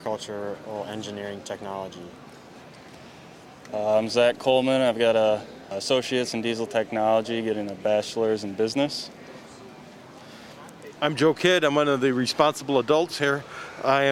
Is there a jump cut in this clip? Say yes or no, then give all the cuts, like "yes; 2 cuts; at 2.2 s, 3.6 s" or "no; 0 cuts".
yes; 2 cuts; at 5.7 s, 11.0 s